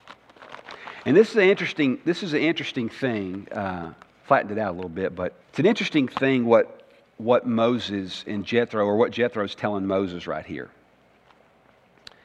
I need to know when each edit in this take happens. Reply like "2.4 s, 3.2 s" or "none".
5.4 s